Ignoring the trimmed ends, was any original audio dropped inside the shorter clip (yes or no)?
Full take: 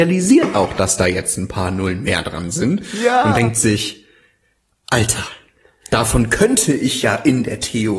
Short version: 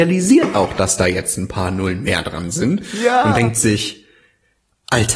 no